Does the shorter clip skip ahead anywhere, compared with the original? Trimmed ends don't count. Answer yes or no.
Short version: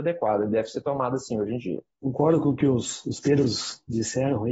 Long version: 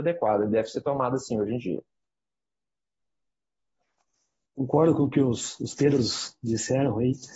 yes